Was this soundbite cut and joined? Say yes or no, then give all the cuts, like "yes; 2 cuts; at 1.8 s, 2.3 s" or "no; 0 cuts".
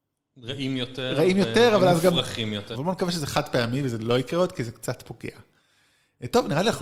yes; 1 cut; at 2.7 s